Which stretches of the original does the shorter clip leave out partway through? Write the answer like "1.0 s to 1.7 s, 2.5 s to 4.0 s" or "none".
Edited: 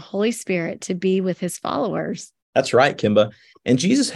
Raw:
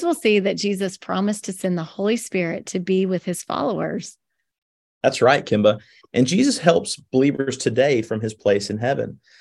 4.3 s to 4.9 s